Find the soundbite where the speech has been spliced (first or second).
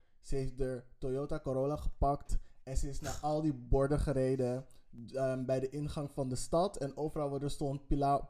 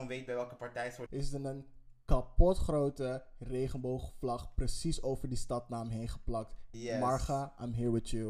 second